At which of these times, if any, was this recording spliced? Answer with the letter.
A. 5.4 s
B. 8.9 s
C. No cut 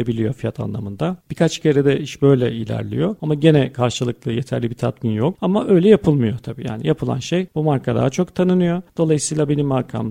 A